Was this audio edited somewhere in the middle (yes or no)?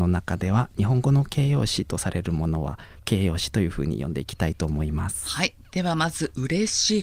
no